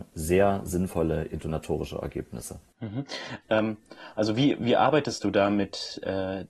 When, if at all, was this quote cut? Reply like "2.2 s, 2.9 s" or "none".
3.4 s